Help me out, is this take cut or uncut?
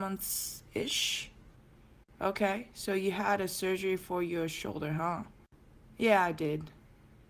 uncut